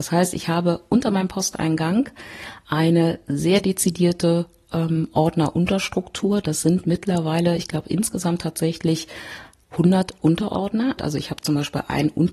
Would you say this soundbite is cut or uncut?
cut